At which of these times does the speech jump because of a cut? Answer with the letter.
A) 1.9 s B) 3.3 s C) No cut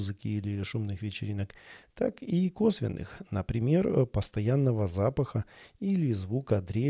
C